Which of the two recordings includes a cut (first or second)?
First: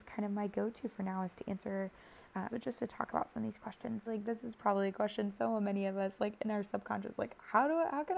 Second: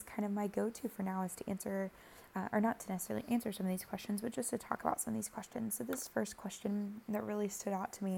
first